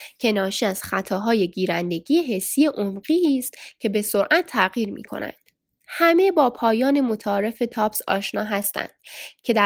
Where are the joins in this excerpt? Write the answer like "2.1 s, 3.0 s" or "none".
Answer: none